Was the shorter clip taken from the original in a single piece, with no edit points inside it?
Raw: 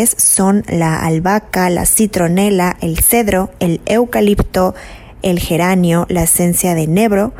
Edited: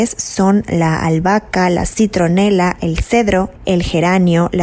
no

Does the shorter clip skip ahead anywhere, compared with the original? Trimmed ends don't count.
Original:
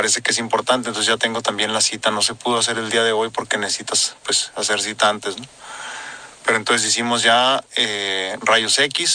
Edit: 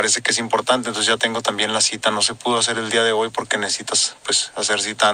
no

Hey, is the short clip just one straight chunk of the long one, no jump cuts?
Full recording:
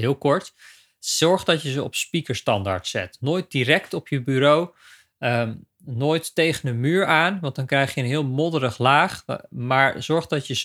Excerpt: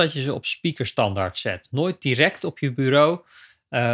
yes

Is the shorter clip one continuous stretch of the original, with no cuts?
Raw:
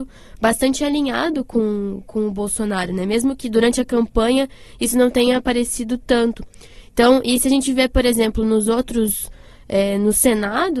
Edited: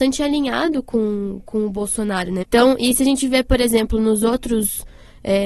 no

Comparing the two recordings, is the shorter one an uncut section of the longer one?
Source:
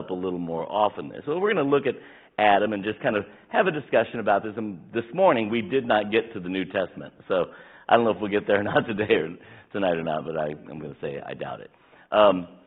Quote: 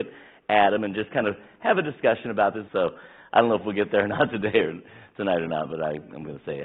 no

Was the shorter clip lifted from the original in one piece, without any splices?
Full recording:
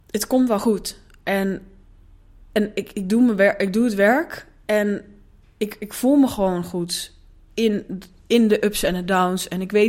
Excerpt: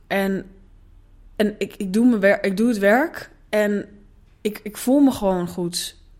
yes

